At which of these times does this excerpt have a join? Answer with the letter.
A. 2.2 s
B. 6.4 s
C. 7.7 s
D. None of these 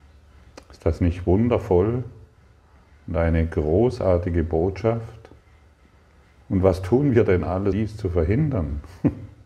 C